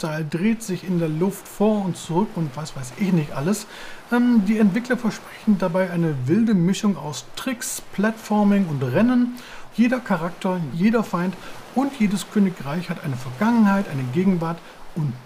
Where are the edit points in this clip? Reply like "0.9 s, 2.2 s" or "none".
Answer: 9.7 s, 10.7 s